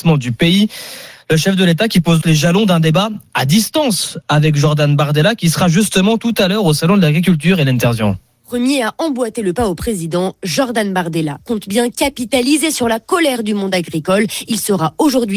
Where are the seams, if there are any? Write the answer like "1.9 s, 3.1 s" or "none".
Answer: 2.2 s, 11.4 s